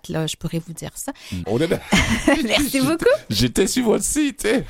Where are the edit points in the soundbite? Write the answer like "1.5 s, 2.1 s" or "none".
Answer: 1.4 s

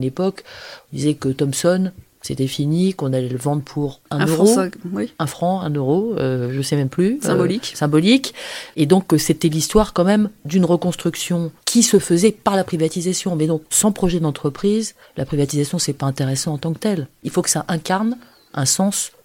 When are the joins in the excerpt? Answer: 11.6 s

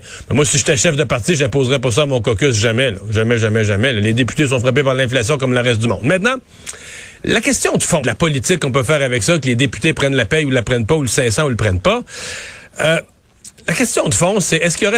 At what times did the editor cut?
8.0 s

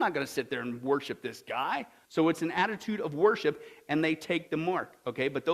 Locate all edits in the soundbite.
2.0 s

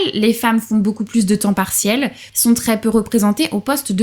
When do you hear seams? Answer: 2.3 s

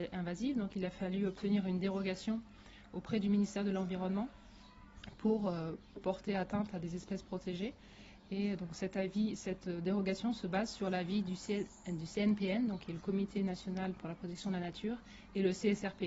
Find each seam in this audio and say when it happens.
none

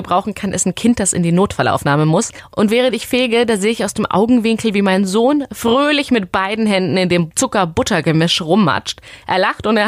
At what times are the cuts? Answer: none

